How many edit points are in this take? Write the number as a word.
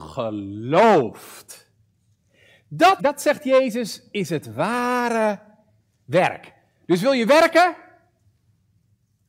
one